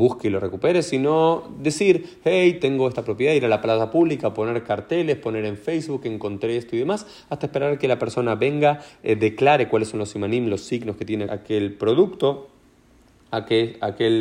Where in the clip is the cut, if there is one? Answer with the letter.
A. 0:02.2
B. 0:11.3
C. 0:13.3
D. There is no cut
B